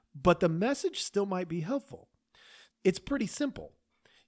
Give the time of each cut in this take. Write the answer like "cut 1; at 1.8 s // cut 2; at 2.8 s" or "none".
cut 1; at 2.7 s